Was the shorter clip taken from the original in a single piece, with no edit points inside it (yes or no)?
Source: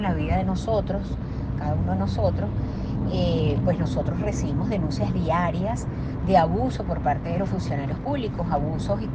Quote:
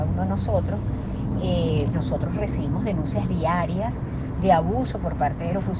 no